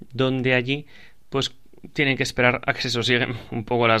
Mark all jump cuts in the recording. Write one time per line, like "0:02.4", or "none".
none